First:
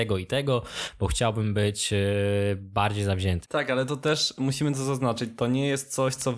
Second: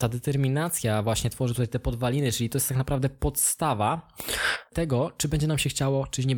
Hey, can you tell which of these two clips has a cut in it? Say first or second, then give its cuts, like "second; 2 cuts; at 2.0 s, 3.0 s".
first; 1 cut; at 3.4 s